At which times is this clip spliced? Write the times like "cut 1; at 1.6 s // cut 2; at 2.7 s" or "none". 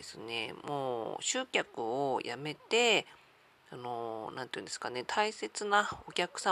none

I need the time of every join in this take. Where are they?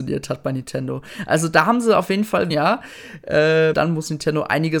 cut 1; at 2.5 s // cut 2; at 3.7 s

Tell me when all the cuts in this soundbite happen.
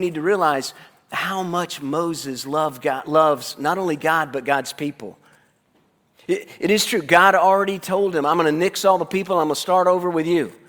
none

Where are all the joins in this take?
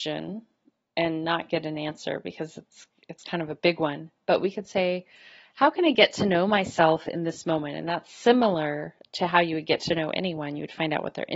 none

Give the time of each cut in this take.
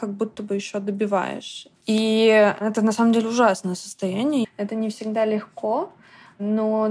cut 1; at 1.8 s // cut 2; at 4.4 s

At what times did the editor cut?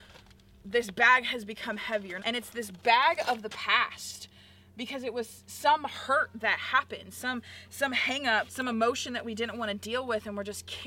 cut 1; at 2.2 s // cut 2; at 8.5 s

